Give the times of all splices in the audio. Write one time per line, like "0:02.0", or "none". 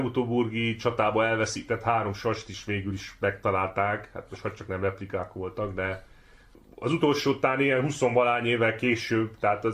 none